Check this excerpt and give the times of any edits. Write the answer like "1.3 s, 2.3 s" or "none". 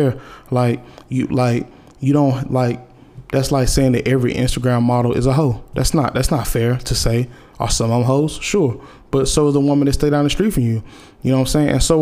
none